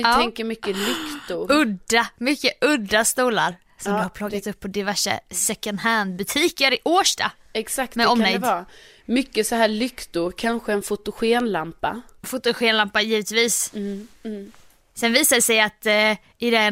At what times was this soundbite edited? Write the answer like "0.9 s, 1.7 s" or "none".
none

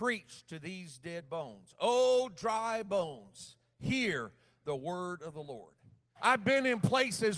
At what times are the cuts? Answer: 6.1 s

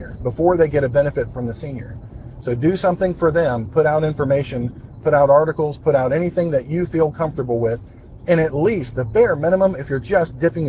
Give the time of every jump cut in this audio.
none

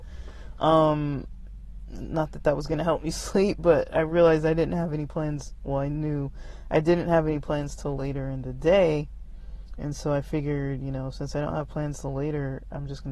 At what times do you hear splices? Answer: none

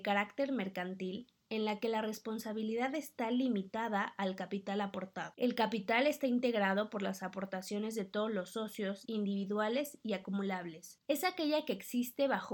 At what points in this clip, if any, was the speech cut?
9.0 s, 11.0 s

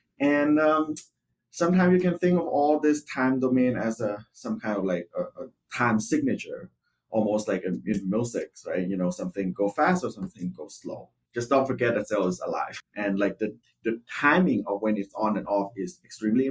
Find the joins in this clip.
11.3 s, 12.8 s

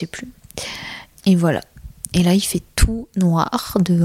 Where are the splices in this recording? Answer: 1.1 s

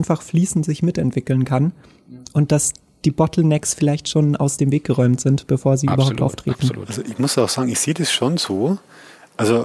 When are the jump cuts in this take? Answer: none

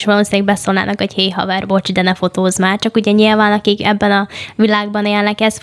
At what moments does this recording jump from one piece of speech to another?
none

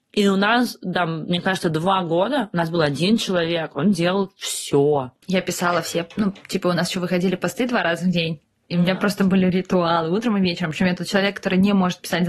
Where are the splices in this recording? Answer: 5.2 s

